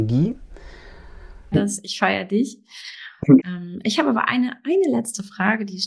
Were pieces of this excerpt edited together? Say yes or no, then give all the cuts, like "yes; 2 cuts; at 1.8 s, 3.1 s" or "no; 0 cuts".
yes; 2 cuts; at 1.5 s, 3.4 s